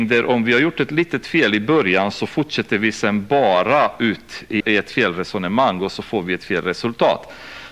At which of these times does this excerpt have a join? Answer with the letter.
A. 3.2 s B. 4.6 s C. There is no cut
B